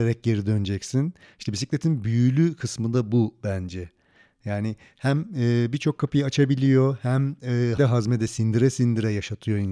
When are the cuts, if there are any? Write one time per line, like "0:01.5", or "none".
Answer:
0:07.8